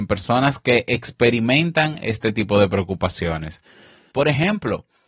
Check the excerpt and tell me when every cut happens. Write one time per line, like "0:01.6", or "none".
0:04.1